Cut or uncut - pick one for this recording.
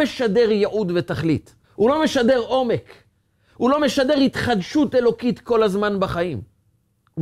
cut